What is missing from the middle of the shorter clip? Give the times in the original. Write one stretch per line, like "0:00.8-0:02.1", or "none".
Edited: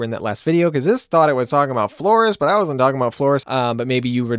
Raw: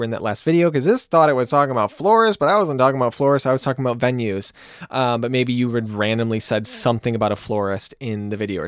0:03.4-0:04.9